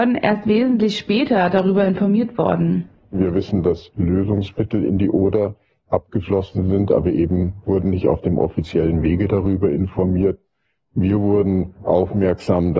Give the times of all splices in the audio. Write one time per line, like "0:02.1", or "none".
none